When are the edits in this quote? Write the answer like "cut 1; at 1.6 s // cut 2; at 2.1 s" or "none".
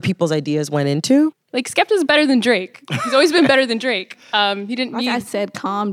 cut 1; at 1.3 s